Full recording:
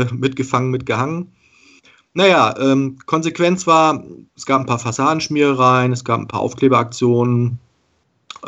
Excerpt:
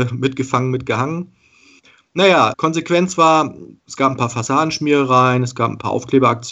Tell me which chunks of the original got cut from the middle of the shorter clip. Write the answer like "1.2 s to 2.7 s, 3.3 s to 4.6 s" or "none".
2.5 s to 3.0 s